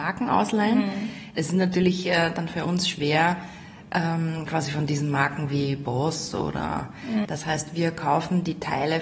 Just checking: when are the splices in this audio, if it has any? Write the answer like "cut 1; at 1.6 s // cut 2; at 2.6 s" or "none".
cut 1; at 7.2 s